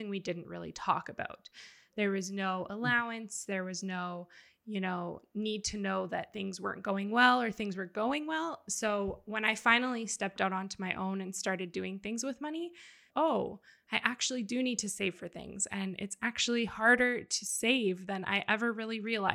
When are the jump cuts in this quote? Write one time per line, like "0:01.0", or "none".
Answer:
0:13.1